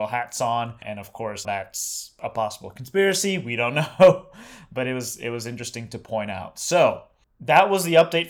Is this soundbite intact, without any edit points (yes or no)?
no